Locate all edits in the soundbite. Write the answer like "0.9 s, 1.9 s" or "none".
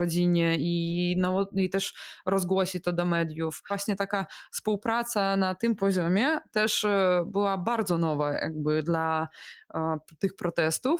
none

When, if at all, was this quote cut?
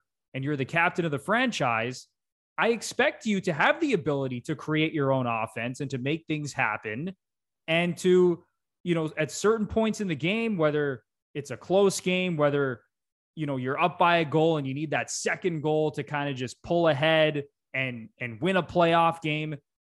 none

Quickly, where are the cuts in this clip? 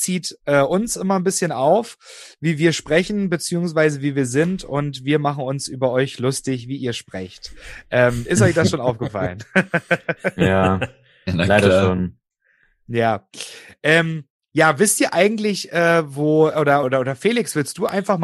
16.8 s

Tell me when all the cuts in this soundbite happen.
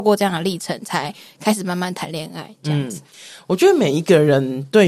none

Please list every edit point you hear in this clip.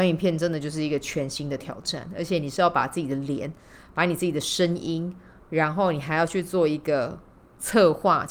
none

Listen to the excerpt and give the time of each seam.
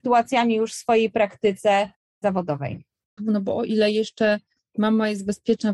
3.2 s

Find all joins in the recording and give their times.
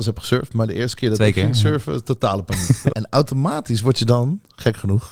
2.9 s

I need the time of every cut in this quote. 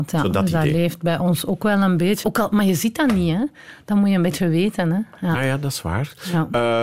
2.2 s, 5.3 s

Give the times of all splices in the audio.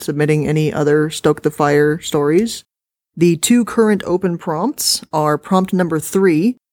none

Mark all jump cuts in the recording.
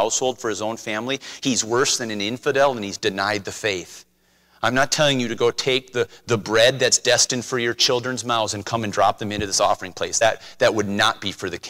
none

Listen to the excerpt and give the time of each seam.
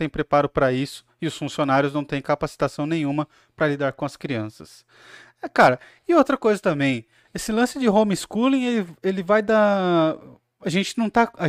none

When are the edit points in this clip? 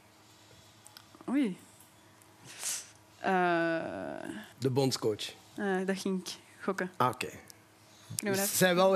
4.5 s

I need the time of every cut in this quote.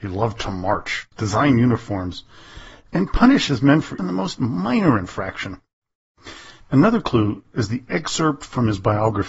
1.1 s, 4.0 s, 6.6 s

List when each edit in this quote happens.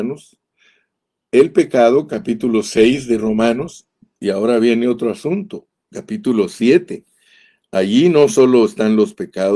none

